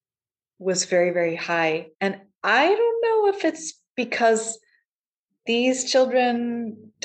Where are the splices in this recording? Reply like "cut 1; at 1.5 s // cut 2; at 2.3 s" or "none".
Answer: cut 1; at 1.9 s